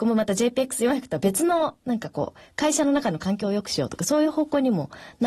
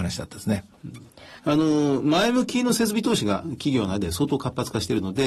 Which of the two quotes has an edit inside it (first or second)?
second